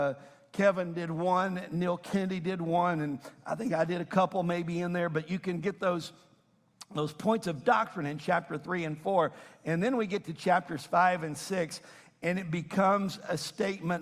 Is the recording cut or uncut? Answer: uncut